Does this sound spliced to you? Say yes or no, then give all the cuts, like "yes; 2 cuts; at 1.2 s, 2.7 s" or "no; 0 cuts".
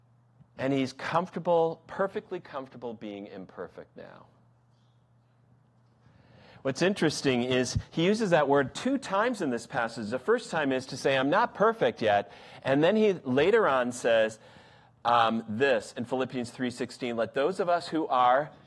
no; 0 cuts